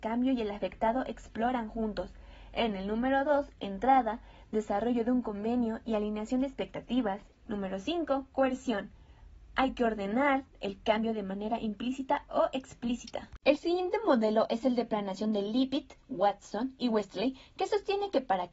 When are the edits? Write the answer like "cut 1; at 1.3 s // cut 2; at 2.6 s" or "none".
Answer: cut 1; at 7.5 s